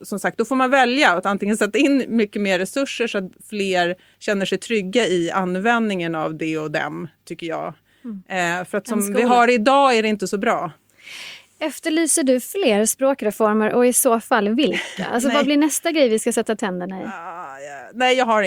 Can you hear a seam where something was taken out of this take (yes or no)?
no